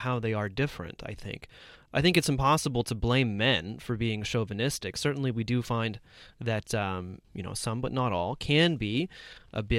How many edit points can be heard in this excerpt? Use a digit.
1